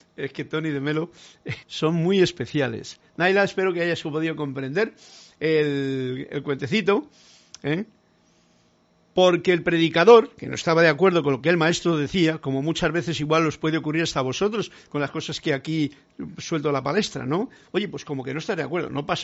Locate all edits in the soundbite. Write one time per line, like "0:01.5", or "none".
0:01.6